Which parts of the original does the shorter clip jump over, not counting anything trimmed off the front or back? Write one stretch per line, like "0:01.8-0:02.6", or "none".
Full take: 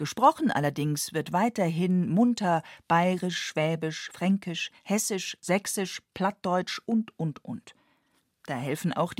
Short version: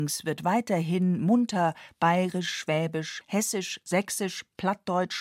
0:04.1-0:04.8